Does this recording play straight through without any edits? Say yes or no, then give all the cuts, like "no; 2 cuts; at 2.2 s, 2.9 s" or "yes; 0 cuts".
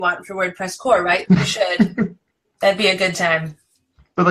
no; 1 cut; at 1.2 s